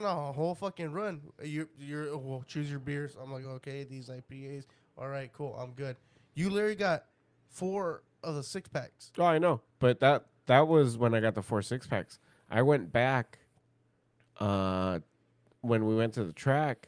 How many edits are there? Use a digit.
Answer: 0